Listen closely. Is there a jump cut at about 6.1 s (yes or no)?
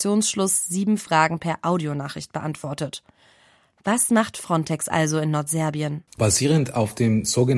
yes